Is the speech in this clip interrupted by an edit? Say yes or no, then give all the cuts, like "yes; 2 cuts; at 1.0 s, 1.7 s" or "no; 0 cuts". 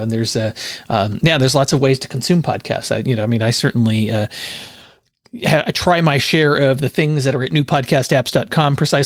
no; 0 cuts